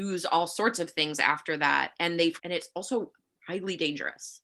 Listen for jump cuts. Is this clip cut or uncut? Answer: cut